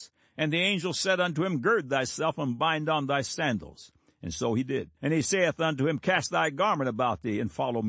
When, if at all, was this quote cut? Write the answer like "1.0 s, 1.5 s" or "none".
5.0 s